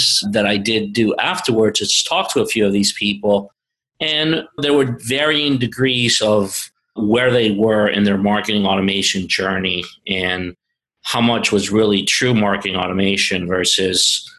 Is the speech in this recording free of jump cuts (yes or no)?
no